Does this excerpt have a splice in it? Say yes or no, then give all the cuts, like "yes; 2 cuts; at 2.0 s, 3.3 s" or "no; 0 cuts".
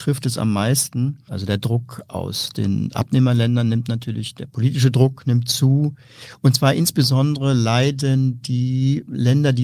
yes; 1 cut; at 1.3 s